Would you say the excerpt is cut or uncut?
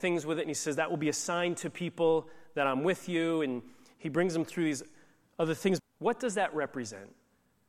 cut